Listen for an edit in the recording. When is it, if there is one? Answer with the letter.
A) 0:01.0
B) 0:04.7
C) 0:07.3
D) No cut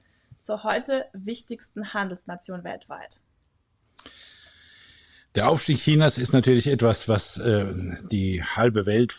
D